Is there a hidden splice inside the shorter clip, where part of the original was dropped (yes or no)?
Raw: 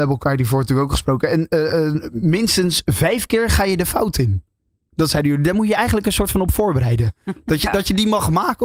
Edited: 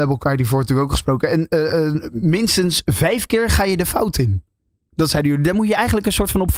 no